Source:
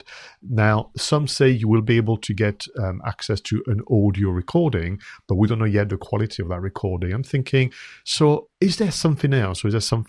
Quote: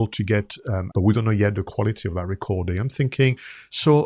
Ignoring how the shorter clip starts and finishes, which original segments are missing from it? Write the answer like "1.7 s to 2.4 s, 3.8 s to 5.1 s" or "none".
3.0 s to 5.3 s